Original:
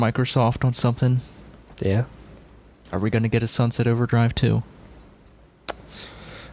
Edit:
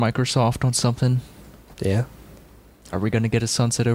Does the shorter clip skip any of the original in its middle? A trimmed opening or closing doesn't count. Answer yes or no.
no